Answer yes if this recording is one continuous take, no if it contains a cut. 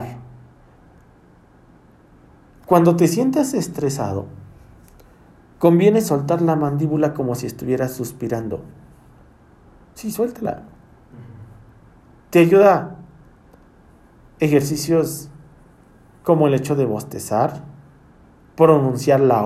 yes